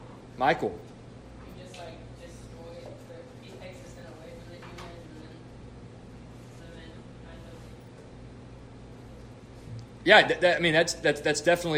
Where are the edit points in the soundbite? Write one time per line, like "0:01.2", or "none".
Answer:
none